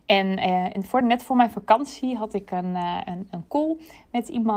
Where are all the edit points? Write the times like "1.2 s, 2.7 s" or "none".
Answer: none